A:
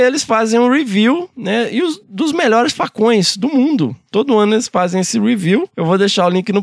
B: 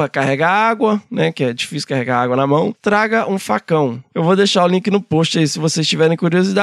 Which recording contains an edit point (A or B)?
B